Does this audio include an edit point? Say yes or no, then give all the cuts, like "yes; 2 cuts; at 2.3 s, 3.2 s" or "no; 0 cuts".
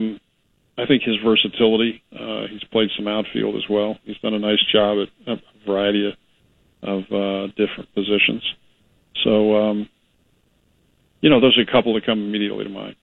no; 0 cuts